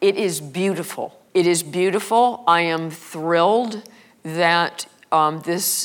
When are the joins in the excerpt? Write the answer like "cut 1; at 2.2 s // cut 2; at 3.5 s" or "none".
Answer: cut 1; at 1.3 s